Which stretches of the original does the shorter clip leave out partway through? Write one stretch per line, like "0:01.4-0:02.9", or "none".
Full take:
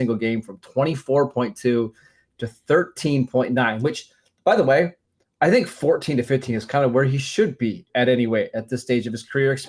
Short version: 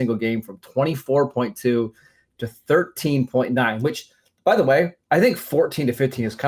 0:05.0-0:05.3